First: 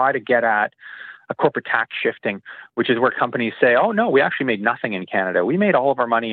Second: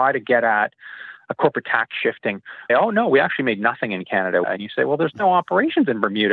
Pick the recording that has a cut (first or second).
second